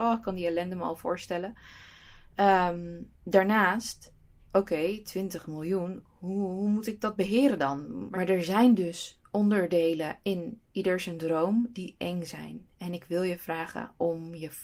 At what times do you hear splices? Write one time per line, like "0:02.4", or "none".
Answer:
0:08.1
0:10.7